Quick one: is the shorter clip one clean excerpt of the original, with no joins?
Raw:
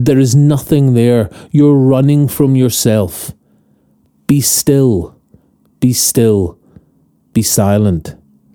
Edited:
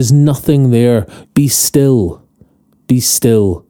no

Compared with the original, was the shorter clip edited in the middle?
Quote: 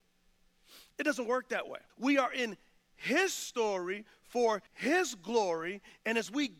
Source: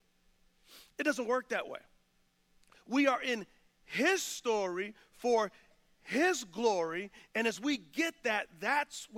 yes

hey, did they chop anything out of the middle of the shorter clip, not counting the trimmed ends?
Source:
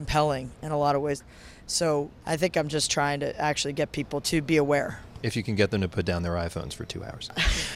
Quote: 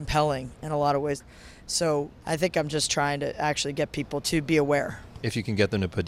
no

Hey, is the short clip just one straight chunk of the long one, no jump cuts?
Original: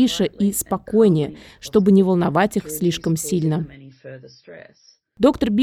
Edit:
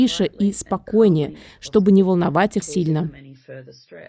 no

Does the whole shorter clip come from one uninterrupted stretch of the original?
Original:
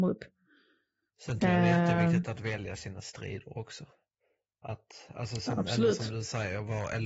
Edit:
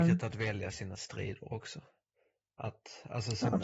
yes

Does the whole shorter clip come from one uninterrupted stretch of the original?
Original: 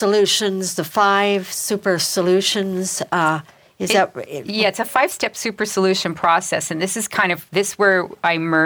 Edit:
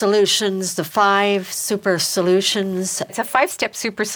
no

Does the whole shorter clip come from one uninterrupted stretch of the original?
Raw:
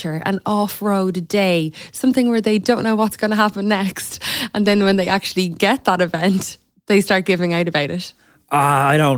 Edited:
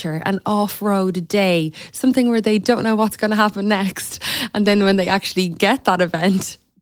yes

